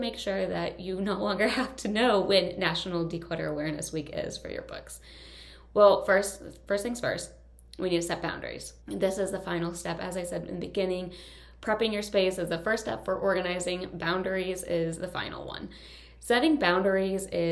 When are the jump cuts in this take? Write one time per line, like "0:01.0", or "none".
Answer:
0:08.8